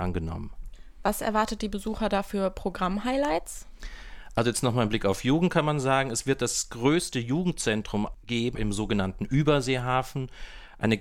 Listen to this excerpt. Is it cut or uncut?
cut